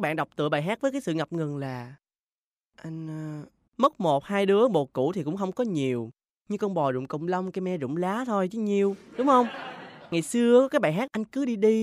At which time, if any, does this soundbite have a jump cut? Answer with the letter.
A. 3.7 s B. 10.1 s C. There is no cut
A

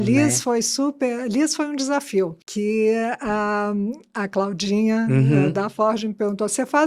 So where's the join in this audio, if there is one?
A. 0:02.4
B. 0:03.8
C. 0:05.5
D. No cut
A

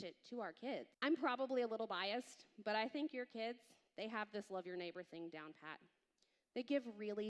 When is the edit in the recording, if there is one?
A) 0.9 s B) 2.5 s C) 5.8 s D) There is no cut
A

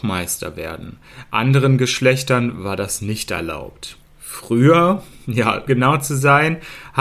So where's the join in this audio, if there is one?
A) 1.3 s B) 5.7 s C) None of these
B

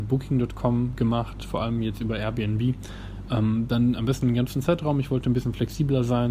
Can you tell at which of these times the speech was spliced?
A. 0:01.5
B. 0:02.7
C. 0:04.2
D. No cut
C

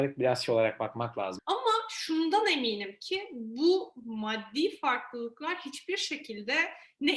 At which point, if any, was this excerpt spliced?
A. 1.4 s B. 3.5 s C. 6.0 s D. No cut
A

